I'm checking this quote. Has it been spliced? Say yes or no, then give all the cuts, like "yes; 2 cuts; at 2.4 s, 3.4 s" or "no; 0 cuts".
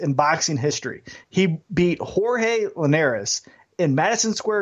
yes; 1 cut; at 1.2 s